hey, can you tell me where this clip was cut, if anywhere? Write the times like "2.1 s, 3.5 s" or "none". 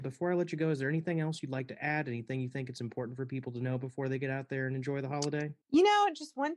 5.6 s

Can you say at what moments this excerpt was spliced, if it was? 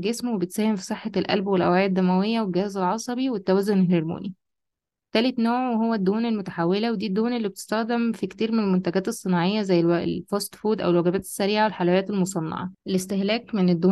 none

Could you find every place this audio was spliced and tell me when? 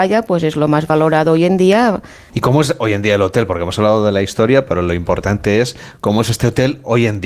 2.3 s

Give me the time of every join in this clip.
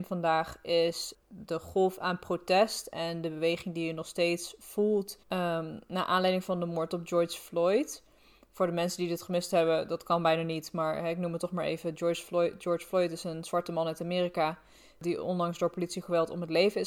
5.2 s

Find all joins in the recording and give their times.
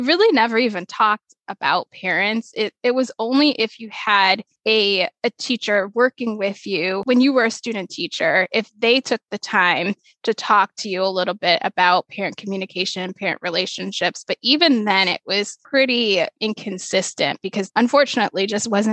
none

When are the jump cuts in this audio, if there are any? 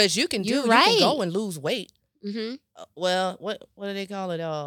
none

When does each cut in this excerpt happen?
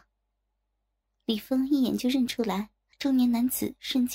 2.9 s

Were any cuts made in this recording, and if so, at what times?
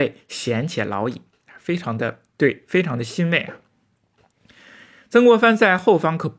none

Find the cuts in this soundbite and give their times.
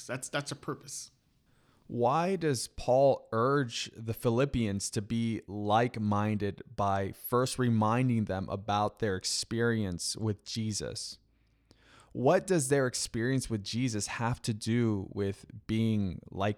none

